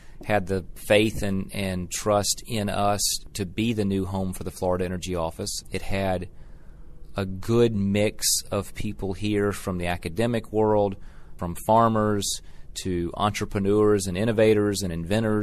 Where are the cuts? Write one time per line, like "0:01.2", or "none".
0:05.6
0:11.4